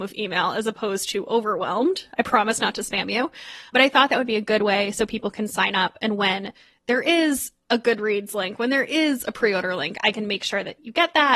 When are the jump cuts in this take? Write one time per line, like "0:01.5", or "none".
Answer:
none